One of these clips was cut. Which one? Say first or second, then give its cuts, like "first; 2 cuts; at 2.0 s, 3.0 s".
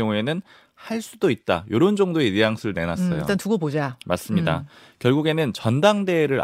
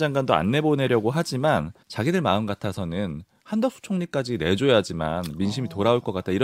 second; 1 cut; at 1.8 s